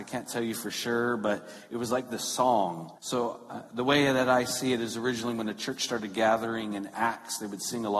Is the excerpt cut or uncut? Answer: cut